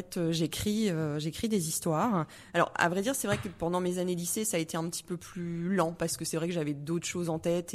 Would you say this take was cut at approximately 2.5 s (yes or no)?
yes